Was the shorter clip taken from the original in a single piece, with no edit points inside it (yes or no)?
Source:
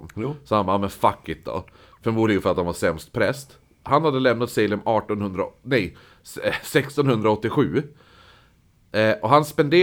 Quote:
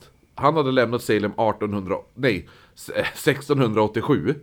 yes